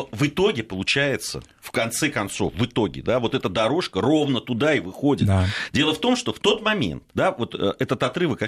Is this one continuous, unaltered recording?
no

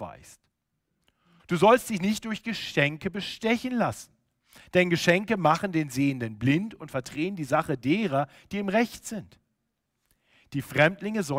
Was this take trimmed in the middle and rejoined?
yes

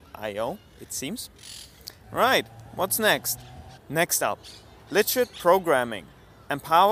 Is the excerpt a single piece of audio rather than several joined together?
no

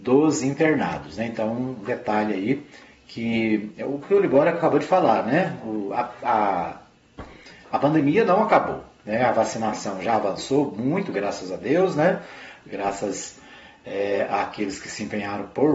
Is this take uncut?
yes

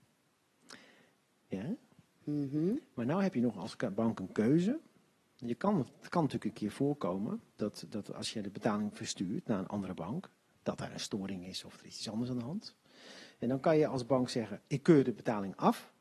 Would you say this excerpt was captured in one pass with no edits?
yes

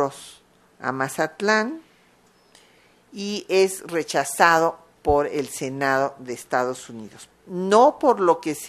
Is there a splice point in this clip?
yes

